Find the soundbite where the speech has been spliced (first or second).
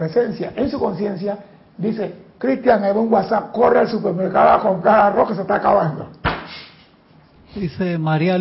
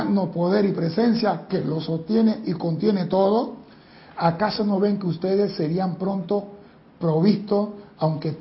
first